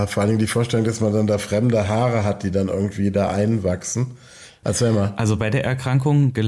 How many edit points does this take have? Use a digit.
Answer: 1